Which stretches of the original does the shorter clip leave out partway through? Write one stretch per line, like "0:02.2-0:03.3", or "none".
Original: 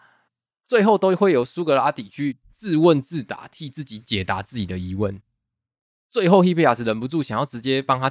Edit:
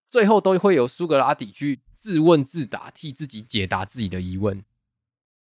none